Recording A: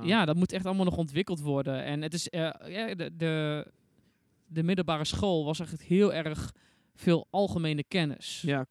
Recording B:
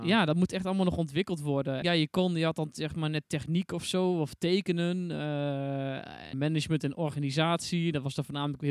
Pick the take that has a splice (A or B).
B